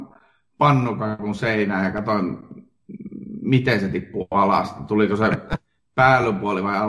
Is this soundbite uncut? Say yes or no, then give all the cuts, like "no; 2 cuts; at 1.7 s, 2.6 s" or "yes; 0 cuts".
yes; 0 cuts